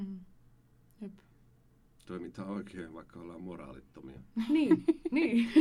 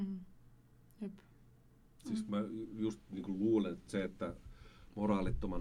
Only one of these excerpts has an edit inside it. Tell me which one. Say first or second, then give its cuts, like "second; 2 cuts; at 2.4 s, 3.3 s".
second; 1 cut; at 2.0 s